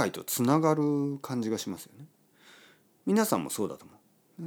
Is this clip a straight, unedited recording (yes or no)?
yes